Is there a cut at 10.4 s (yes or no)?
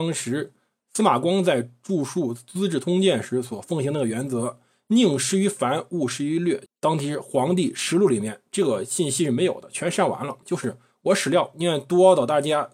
yes